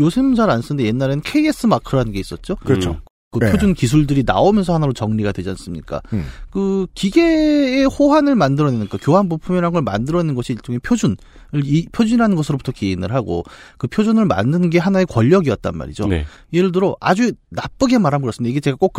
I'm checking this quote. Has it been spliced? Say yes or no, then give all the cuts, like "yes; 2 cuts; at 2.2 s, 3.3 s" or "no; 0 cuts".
no; 0 cuts